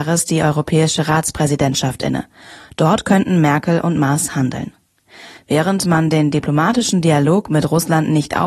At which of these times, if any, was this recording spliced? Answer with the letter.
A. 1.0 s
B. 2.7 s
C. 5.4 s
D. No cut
C